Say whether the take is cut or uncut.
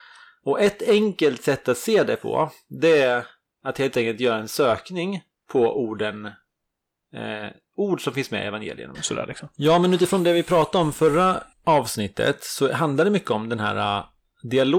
cut